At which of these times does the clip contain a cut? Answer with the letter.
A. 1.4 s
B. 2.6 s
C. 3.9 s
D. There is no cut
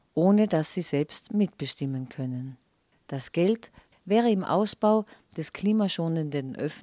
C